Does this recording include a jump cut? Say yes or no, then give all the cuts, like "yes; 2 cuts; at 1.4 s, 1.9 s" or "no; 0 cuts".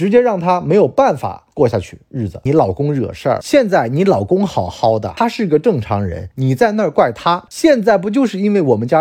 yes; 3 cuts; at 2.5 s, 6.3 s, 7.5 s